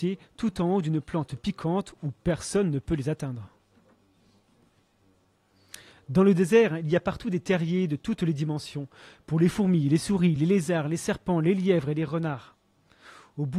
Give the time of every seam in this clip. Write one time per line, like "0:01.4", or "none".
none